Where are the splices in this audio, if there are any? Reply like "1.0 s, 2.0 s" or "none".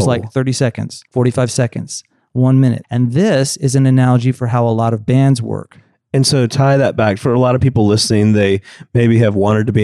1.1 s, 2.8 s